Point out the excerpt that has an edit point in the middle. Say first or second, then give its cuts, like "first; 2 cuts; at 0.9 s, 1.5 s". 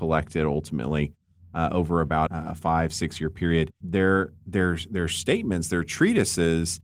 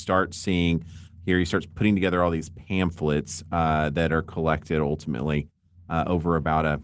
first; 2 cuts; at 2.3 s, 3.8 s